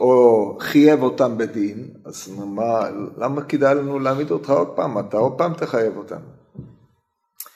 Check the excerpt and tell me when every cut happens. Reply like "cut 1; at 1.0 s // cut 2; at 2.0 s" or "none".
none